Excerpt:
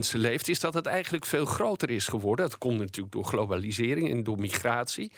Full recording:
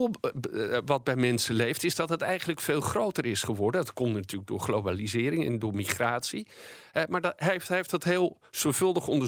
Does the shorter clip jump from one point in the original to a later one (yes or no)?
no